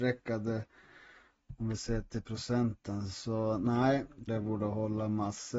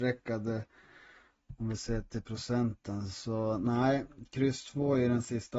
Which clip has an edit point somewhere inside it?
first; 1 cut; at 4.3 s

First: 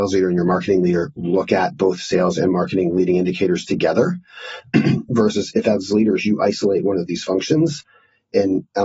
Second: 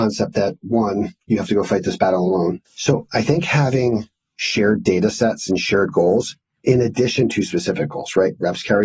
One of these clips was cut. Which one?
second; 1 cut; at 2.7 s

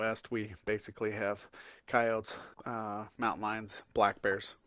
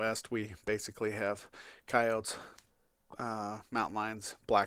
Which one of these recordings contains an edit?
first; 1 cut; at 2.5 s

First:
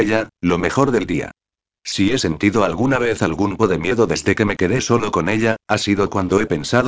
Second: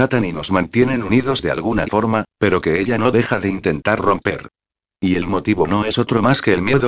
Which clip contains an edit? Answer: first; 1 cut; at 3.6 s

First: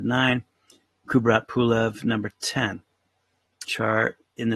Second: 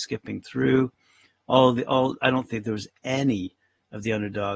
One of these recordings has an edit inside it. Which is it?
first; 1 cut; at 3.6 s

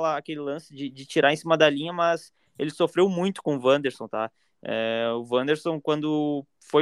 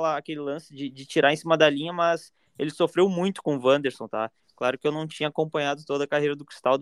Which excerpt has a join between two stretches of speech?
second; 1 cut; at 4.4 s

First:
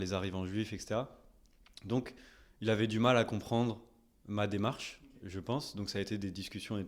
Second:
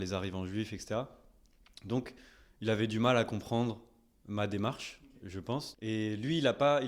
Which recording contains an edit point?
second; 1 cut; at 5.7 s

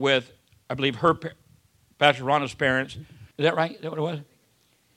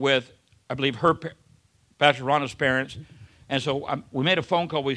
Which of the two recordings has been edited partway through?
first; 1 cut; at 3.3 s

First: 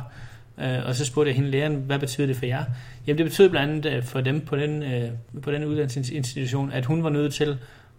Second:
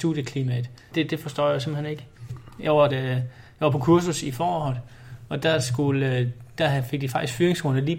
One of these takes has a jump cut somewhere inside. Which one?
second; 1 cut; at 2.9 s

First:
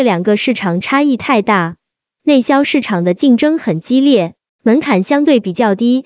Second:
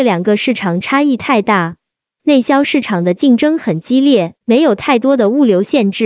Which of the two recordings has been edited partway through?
second; 1 cut; at 4.4 s

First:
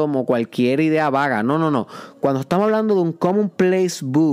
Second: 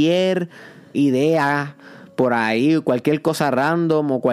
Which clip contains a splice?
second; 1 cut; at 0.9 s

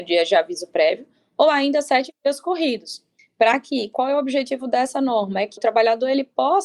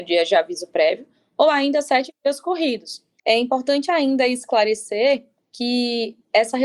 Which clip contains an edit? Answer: second; 1 cut; at 3.2 s

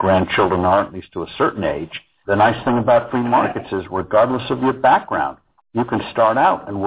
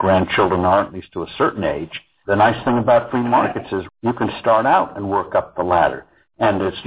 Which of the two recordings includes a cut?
second; 1 cut; at 3.9 s

